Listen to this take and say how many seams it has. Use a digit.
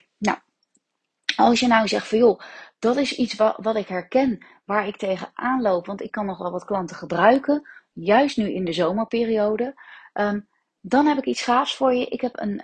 0